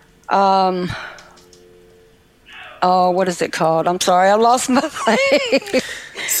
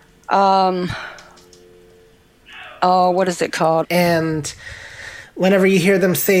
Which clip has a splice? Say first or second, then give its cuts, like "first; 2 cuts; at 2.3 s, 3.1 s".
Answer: second; 1 cut; at 3.8 s